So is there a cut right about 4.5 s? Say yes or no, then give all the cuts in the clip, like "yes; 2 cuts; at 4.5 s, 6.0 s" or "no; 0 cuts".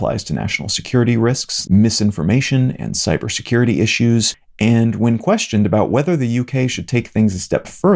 no; 1 cut; at 1.7 s